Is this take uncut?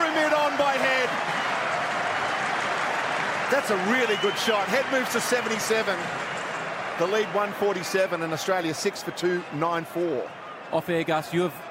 yes; 0 cuts

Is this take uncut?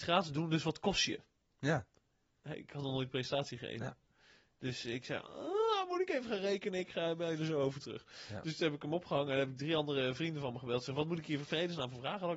yes; 0 cuts

